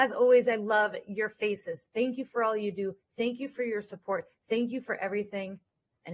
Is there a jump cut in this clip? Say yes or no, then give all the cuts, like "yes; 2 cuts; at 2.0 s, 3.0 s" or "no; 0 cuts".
no; 0 cuts